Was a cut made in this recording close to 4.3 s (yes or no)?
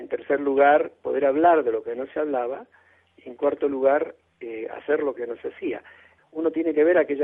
no